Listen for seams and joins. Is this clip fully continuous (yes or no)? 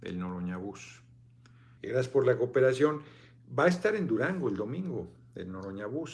no